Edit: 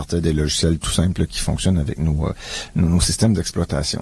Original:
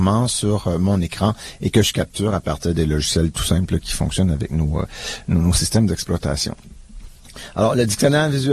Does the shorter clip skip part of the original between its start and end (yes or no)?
no